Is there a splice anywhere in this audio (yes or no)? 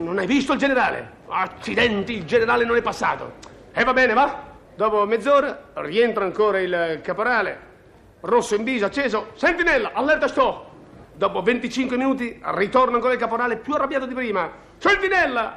yes